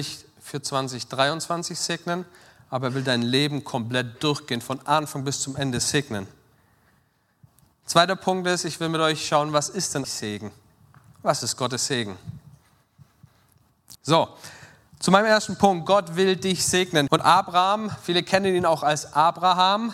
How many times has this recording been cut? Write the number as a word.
three